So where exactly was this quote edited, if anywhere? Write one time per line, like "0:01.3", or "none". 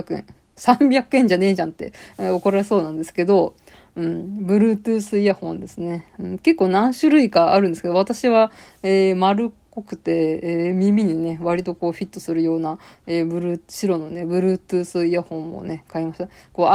none

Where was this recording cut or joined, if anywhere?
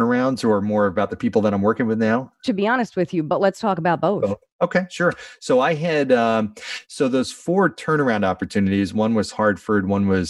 none

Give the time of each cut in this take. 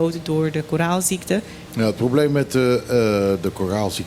0:01.7

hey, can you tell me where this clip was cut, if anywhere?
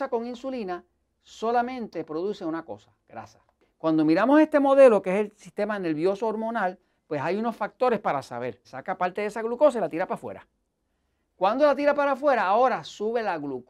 0:08.6

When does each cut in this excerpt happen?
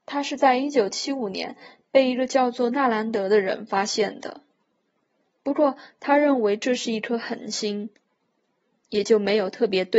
none

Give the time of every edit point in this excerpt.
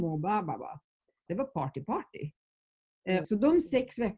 0:01.3
0:03.2

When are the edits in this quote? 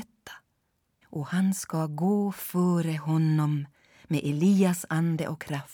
0:01.0

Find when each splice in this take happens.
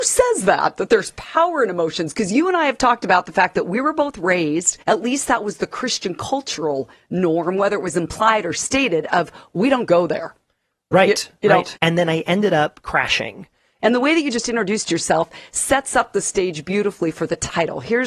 0:04.8
0:11.8
0:13.8

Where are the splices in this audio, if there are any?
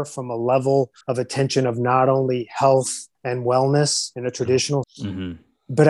0:01.0
0:03.1
0:04.8

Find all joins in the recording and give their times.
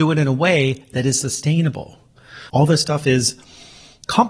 0:02.5

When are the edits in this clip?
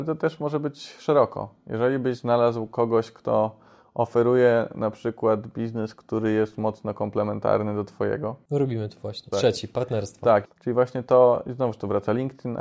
0:09.3
0:10.4

